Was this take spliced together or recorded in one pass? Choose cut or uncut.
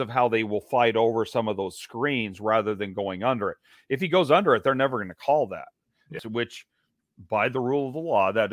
cut